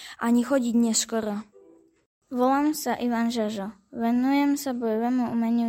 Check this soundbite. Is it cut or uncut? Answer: uncut